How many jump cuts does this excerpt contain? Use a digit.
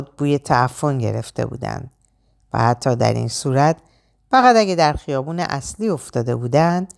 0